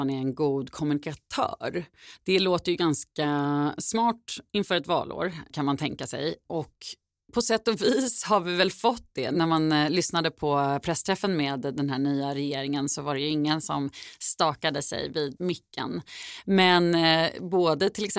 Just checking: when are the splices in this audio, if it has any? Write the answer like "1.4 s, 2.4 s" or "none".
15.4 s